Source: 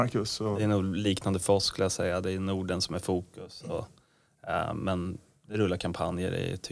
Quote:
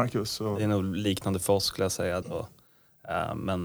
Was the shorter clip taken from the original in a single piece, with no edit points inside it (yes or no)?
no